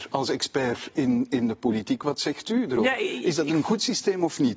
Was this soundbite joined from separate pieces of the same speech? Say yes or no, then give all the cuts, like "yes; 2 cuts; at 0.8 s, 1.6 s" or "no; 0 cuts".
no; 0 cuts